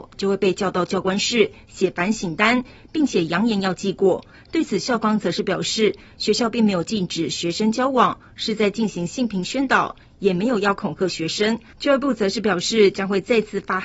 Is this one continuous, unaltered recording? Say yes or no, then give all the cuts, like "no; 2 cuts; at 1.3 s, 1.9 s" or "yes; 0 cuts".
no; 1 cut; at 4.3 s